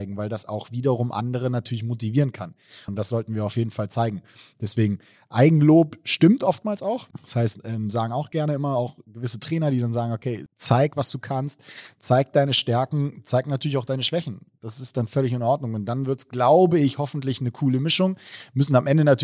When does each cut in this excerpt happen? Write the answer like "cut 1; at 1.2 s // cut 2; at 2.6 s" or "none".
cut 1; at 2.9 s // cut 2; at 7.1 s // cut 3; at 10.5 s